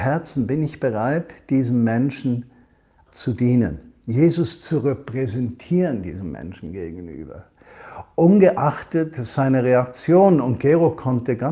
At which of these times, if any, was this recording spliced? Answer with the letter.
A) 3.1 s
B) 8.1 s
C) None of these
A